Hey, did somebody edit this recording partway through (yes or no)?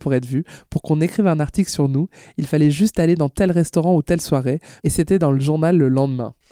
yes